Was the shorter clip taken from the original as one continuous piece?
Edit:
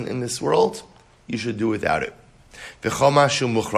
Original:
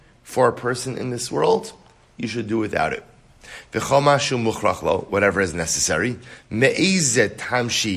yes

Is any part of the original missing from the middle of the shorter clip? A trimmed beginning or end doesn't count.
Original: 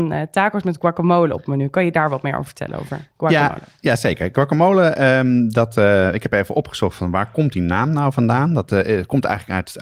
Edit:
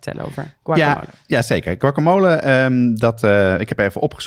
no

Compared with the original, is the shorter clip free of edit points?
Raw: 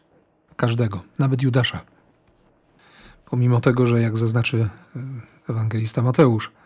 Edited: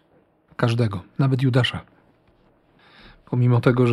yes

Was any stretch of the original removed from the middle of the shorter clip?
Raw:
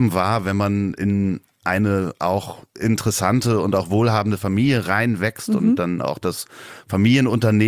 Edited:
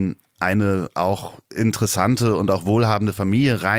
no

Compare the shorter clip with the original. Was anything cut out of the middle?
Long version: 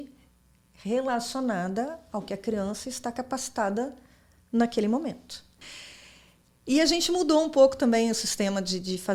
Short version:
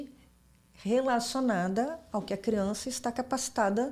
no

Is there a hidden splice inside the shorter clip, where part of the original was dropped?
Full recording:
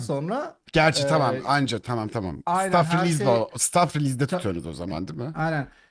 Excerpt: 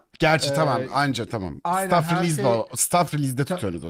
yes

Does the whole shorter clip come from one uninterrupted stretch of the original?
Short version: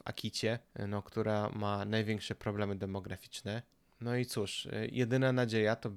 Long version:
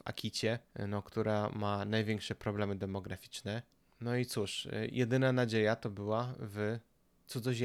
yes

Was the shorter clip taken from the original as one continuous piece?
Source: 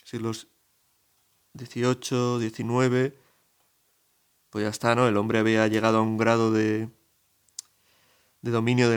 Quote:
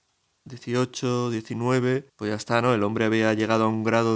no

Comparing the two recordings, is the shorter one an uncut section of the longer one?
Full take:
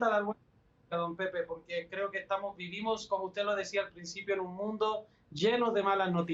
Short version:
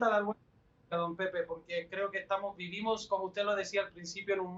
yes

